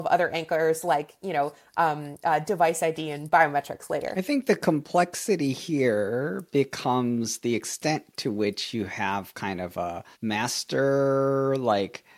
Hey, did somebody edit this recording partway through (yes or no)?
yes